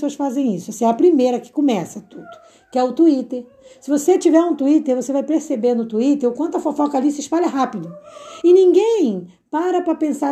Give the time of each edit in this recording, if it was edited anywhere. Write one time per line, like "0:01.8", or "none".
none

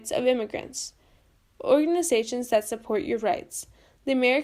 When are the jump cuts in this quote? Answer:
0:01.5

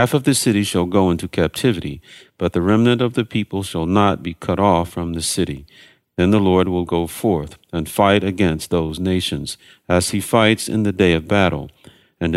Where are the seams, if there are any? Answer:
none

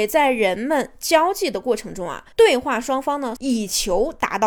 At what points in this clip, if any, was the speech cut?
0:02.3
0:03.4

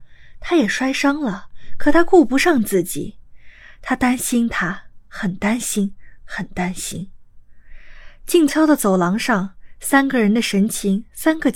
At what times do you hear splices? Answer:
0:08.5

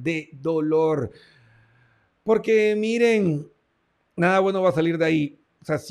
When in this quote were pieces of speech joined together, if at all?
none

